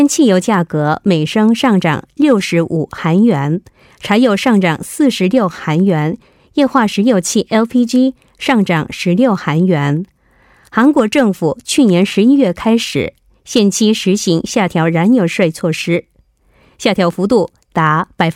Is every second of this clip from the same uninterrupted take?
yes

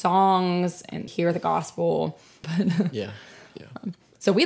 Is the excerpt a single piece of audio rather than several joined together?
no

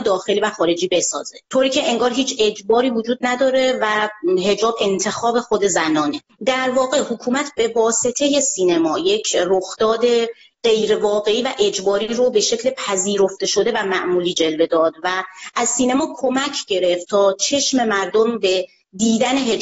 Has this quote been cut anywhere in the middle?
yes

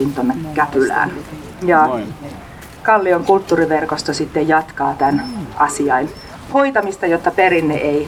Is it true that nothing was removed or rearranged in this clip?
yes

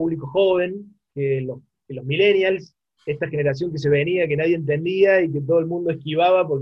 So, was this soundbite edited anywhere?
no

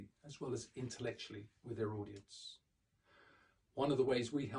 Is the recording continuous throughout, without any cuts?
yes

